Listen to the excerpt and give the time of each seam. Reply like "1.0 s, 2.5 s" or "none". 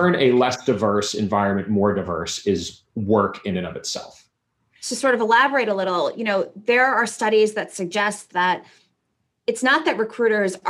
4.6 s